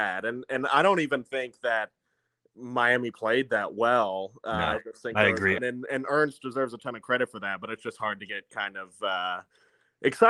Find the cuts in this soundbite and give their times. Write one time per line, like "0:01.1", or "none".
0:05.6

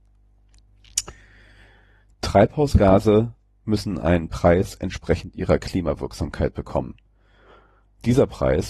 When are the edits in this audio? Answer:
0:02.1

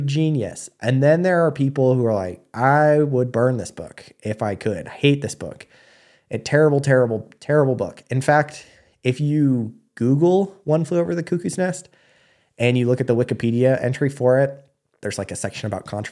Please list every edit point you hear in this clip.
0:15.0

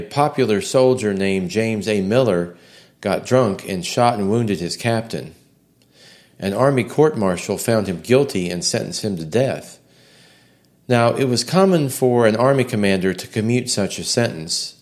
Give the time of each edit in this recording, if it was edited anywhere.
none

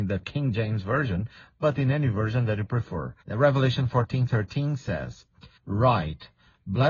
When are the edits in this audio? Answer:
0:03.2
0:05.6

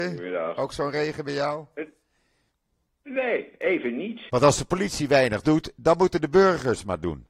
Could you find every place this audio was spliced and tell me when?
0:04.3

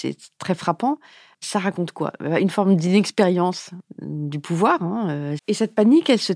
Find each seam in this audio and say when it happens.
0:05.4

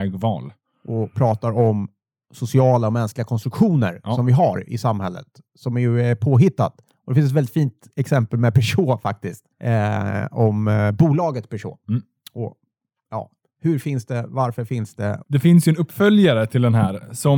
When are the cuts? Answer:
0:09.5
0:15.2

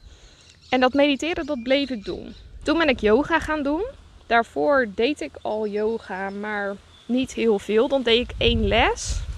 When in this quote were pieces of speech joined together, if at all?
0:02.6

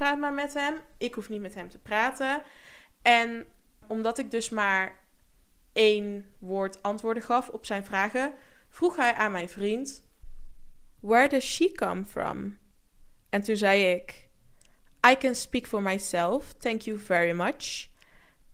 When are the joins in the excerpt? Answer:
0:03.8

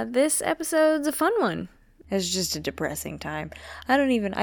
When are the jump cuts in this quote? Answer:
0:02.0

